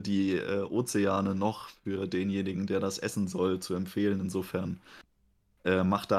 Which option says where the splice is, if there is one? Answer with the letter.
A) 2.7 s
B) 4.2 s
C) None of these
C